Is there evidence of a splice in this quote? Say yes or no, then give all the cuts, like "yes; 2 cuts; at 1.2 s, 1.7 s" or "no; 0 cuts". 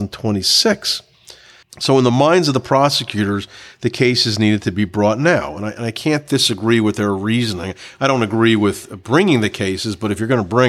yes; 1 cut; at 1.6 s